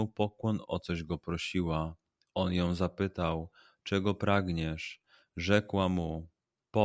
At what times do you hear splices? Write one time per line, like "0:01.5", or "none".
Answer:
none